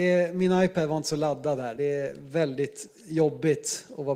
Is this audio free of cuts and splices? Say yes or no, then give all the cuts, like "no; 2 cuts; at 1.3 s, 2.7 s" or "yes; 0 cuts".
yes; 0 cuts